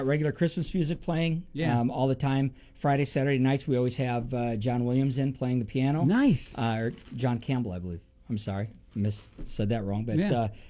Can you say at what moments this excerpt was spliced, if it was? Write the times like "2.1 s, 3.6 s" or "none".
7.0 s